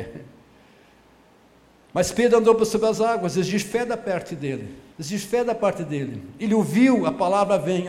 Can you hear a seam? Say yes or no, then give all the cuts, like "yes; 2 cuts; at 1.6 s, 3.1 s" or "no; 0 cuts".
yes; 1 cut; at 4.9 s